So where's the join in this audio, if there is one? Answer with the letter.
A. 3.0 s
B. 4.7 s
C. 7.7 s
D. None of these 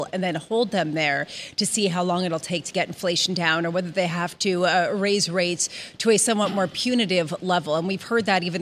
D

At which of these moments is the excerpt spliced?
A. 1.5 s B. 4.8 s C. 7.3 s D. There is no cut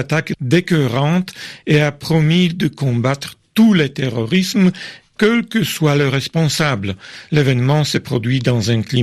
C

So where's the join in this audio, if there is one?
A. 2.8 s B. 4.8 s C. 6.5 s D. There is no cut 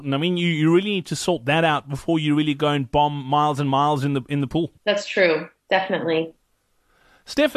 B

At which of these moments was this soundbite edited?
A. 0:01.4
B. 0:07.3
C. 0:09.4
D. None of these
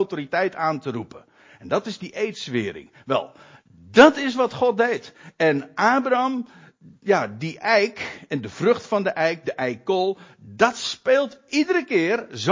D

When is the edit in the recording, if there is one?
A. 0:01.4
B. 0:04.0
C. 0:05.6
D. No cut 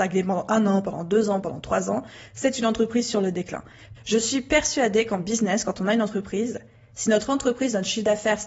B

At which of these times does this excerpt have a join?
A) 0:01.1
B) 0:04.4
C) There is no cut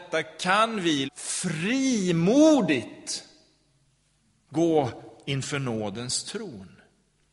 A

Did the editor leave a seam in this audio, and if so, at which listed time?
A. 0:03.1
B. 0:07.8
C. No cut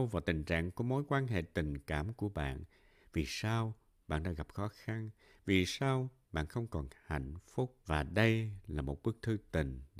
B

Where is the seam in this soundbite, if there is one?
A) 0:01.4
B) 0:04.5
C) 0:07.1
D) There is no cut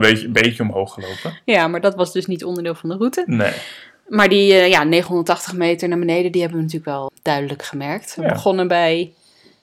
C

